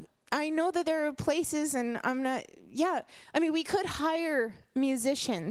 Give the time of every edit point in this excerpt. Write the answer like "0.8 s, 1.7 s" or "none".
none